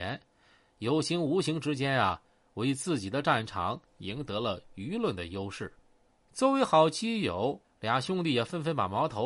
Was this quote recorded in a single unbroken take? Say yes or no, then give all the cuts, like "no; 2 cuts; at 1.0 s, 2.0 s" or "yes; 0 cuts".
no; 1 cut; at 7.6 s